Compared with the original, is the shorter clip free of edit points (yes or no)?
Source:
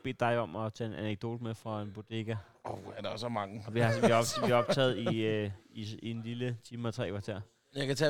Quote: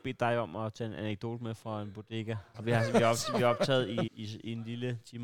no